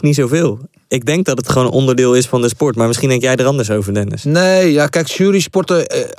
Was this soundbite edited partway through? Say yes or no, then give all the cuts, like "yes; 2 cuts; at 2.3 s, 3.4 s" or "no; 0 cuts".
no; 0 cuts